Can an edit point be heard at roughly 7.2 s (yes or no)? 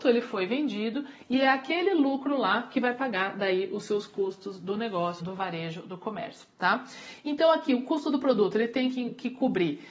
no